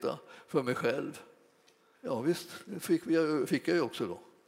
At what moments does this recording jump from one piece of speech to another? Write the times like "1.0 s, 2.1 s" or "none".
1.9 s